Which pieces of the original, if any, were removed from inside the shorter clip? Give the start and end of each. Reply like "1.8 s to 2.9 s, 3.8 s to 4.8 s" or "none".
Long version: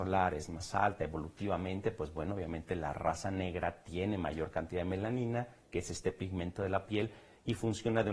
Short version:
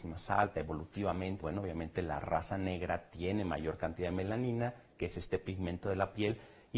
1.8 s to 2.1 s